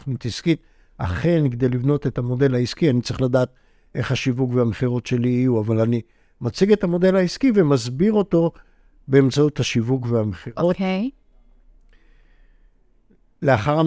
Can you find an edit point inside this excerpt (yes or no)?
no